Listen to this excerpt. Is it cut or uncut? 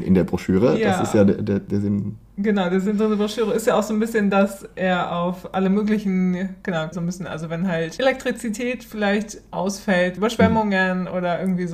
cut